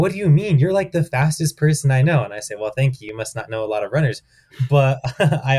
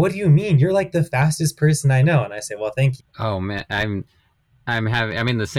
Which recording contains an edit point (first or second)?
second